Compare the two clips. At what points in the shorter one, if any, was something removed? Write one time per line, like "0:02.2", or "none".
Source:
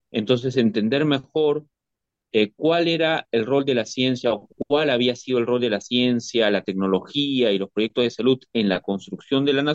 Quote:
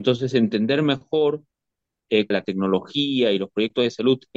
0:02.3